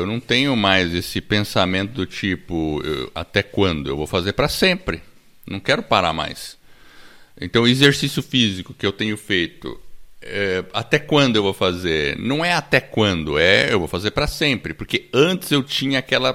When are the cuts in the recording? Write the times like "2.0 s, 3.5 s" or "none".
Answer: none